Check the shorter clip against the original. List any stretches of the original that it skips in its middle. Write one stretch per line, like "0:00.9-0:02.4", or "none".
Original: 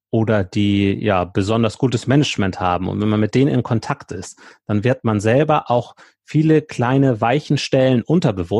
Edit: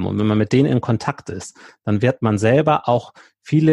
none